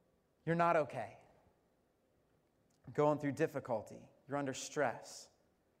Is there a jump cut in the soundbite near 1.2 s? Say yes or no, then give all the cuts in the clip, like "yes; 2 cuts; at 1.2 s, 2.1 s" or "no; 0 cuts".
no; 0 cuts